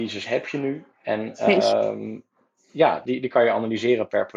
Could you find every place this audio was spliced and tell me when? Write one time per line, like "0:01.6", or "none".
0:03.1

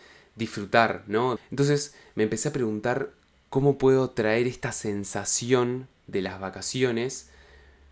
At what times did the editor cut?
0:01.4

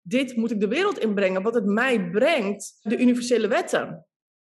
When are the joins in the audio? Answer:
0:02.9

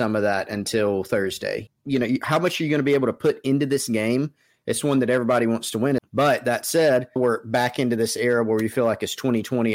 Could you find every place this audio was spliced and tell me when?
0:01.7
0:06.0
0:07.2

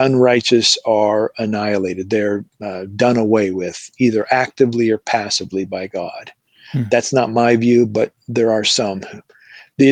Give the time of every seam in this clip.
none

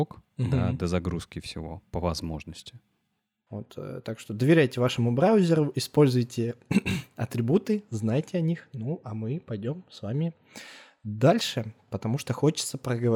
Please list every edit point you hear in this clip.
0:03.5

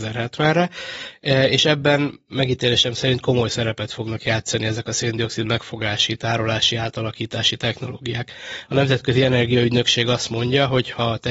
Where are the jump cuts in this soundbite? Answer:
none

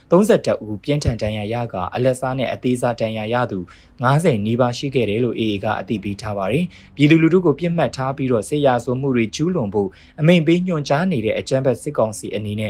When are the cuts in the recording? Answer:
none

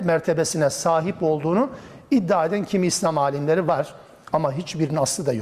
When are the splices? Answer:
none

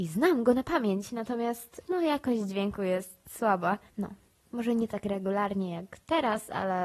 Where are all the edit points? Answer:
0:03.9

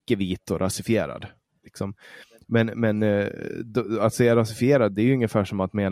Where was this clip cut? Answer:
0:01.6

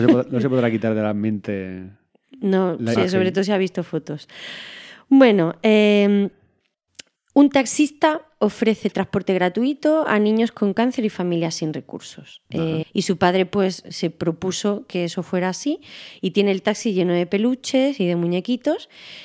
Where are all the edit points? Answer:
0:03.0
0:12.8

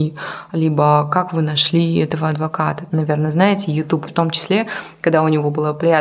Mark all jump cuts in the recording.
0:02.9
0:04.1

